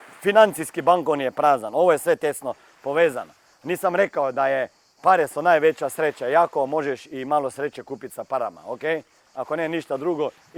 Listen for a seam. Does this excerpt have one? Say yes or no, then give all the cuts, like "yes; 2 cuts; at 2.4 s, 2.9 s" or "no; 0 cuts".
no; 0 cuts